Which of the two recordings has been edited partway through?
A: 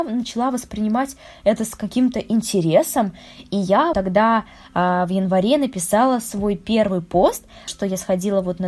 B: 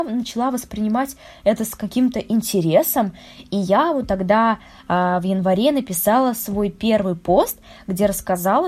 A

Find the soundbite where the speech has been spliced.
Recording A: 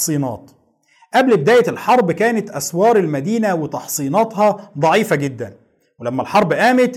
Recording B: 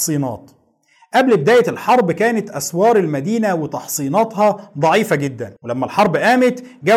B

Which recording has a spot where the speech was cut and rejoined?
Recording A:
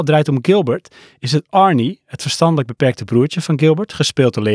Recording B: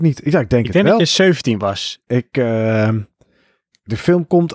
B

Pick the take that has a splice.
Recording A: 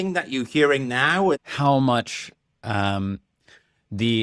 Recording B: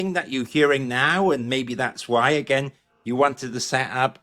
A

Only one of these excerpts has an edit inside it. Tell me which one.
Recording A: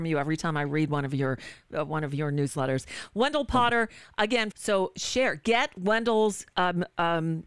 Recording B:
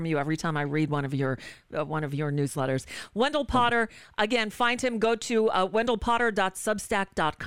A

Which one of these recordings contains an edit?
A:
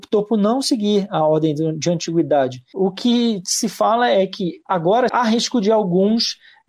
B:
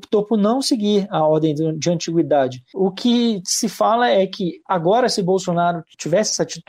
A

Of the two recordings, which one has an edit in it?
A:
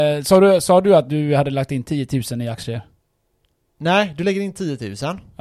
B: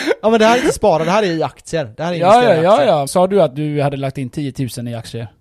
B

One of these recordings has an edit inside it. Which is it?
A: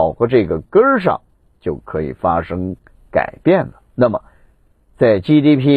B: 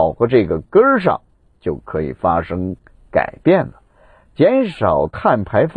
A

